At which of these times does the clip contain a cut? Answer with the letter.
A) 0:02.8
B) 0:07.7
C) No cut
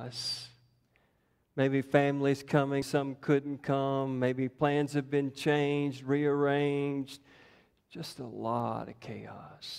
A